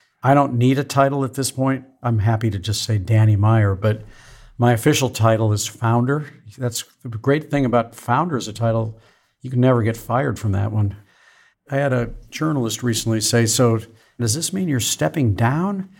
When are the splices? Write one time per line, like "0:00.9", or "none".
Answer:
0:11.5